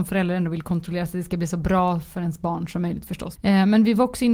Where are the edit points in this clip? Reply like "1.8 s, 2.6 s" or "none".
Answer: 3.4 s